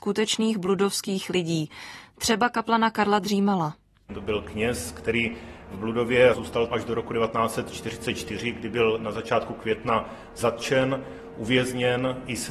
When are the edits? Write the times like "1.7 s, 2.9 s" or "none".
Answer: none

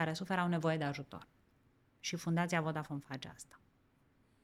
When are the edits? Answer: none

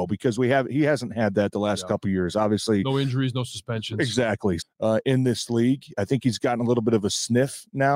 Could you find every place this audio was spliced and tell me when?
4.6 s

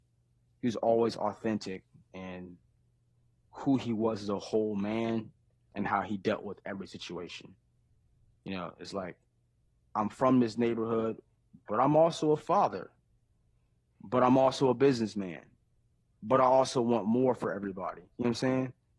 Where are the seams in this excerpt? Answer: none

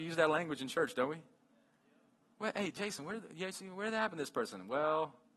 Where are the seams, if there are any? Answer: none

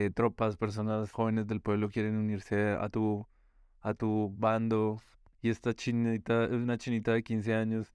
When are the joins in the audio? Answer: 1.1 s, 5.3 s

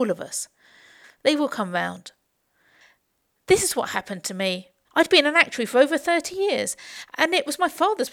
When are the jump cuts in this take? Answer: 1.0 s

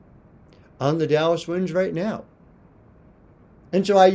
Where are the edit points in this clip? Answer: none

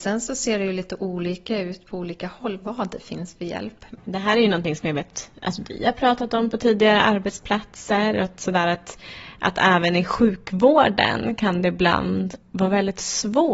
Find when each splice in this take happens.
4.0 s

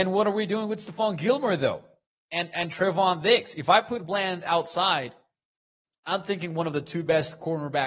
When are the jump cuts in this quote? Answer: none

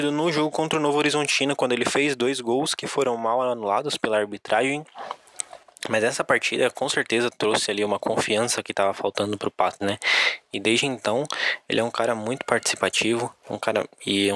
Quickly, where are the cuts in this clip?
9.8 s, 13.4 s

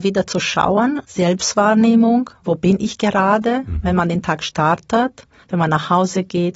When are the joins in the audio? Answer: 1.0 s, 5.4 s

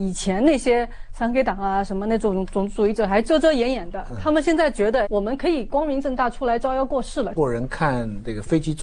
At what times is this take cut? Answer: 5.0 s, 7.4 s

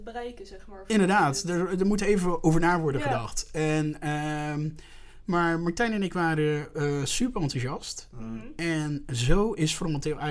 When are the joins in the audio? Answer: none

